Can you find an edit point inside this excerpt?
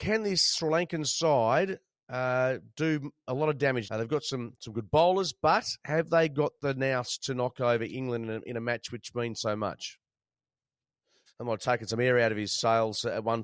yes; 2 cuts; at 3.8 s, 11.3 s

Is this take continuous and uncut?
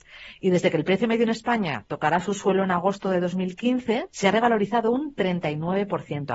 no; 1 cut; at 4.1 s

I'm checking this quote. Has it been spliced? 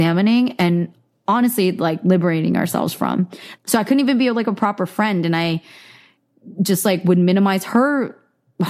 yes; 1 cut; at 3.6 s

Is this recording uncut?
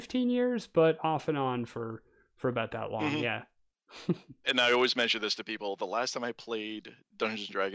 no; 1 cut; at 4.4 s

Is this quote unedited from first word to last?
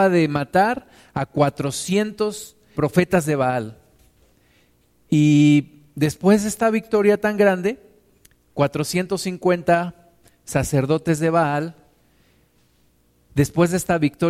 no; 1 cut; at 2.7 s

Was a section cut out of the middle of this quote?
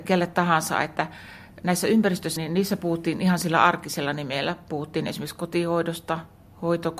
yes; 1 cut; at 2.4 s

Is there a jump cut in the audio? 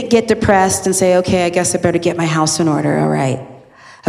no; 0 cuts

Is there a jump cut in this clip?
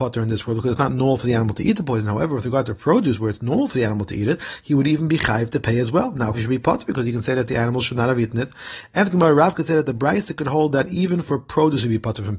yes; 1 cut; at 6.3 s

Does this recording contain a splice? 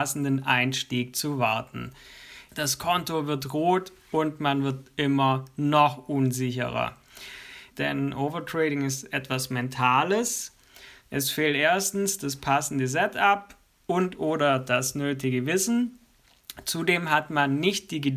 yes; 3 cuts; at 2.5 s, 7.7 s, 11.0 s

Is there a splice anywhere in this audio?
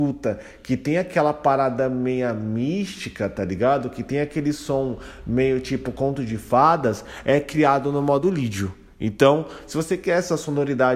no; 0 cuts

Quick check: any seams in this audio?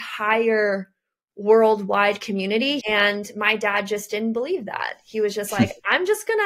yes; 1 cut; at 2.8 s

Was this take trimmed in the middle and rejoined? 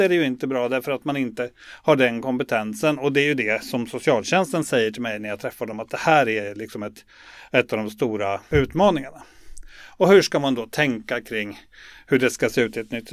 no; 0 cuts

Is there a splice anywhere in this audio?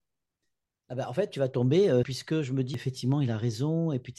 yes; 1 cut; at 2.0 s

